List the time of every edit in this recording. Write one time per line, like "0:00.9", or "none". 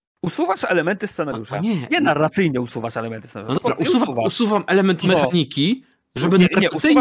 none